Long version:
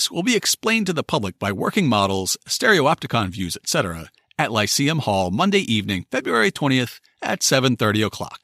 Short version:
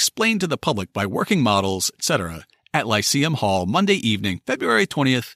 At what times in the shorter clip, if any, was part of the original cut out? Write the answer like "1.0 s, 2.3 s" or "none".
1.9 s